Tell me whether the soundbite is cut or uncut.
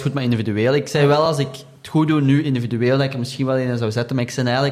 uncut